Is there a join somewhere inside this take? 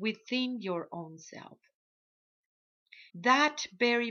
yes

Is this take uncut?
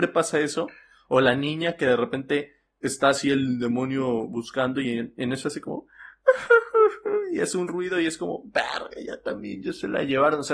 yes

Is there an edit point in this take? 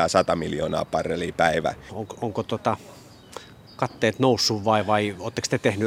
yes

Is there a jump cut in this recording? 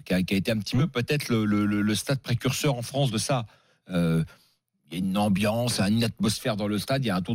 no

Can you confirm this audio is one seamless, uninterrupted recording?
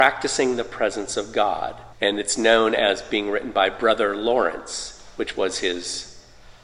no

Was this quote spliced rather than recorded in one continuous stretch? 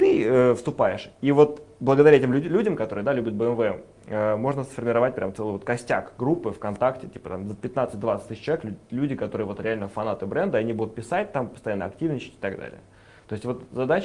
no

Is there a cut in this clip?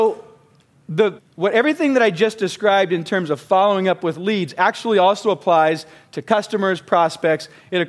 yes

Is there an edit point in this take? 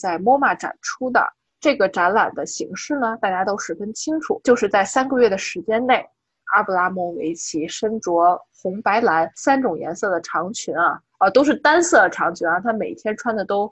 no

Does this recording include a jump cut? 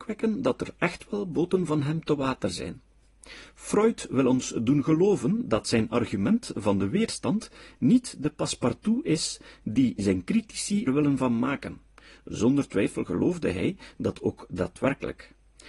yes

